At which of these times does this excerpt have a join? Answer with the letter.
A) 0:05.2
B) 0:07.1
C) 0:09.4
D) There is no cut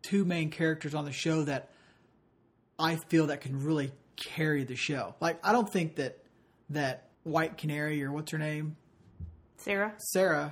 B